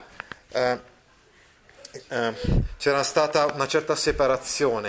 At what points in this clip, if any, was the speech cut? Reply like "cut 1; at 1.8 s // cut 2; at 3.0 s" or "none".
none